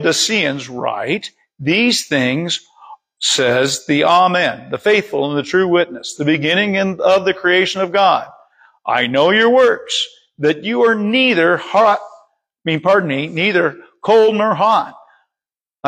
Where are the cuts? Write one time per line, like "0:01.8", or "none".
none